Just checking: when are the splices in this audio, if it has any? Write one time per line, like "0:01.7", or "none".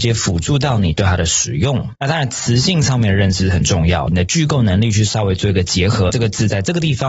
0:02.0
0:04.1
0:06.1